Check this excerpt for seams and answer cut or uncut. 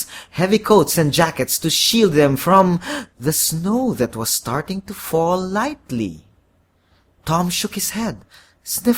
uncut